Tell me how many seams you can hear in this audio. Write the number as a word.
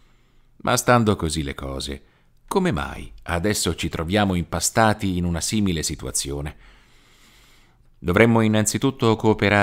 one